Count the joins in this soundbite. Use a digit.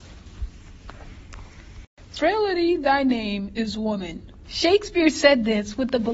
1